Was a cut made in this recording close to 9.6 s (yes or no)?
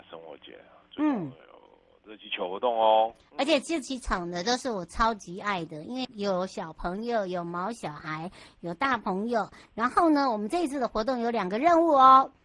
no